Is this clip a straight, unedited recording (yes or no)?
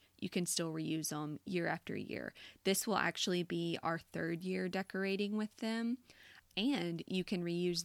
no